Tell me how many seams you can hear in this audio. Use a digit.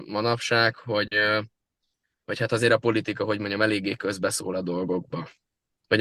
0